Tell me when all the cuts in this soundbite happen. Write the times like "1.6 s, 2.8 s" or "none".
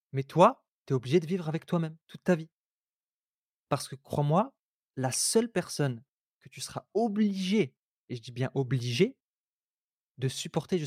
3.6 s